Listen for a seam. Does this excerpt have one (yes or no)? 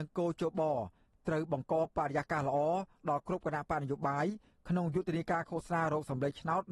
no